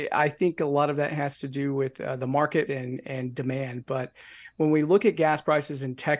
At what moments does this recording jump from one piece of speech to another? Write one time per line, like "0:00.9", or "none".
0:02.7